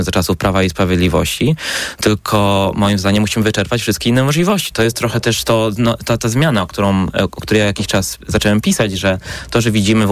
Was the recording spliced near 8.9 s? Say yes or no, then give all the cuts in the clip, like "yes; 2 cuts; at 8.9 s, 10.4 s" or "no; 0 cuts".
no; 1 cut; at 4.7 s